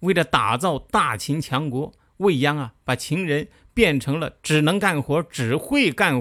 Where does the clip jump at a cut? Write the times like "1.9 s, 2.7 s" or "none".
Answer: none